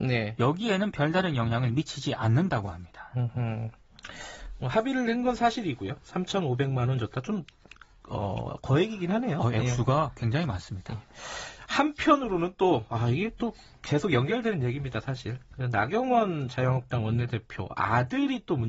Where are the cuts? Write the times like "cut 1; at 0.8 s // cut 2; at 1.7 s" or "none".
none